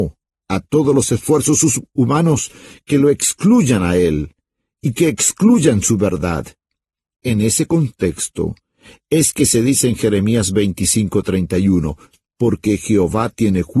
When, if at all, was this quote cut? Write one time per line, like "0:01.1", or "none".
0:07.0

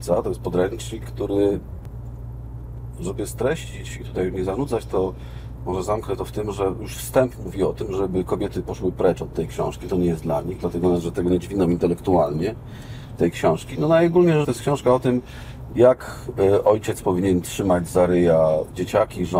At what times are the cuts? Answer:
0:14.4

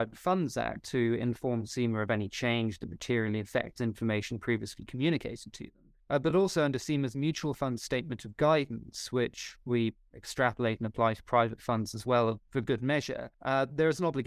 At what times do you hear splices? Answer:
none

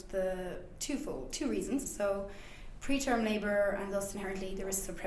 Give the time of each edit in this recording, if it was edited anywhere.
0:01.8

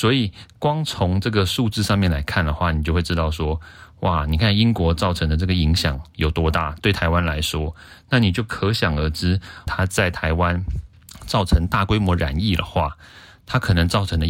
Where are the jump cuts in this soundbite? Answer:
0:09.7

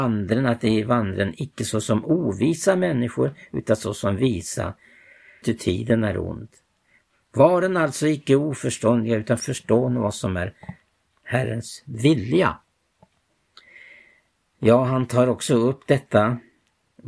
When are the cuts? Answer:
0:05.4

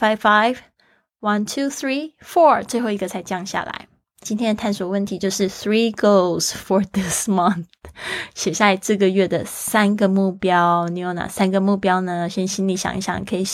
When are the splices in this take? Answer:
0:04.2

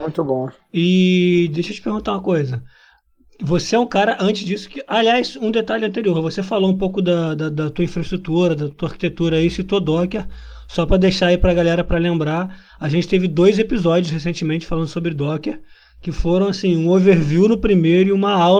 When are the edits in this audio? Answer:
none

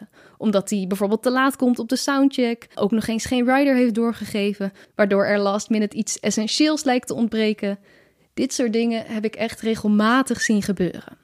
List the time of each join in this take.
0:02.7

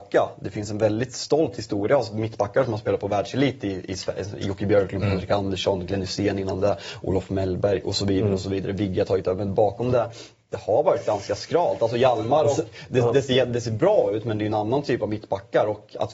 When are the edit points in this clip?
none

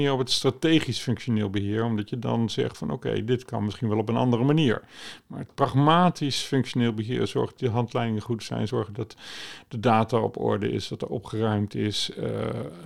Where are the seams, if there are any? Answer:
none

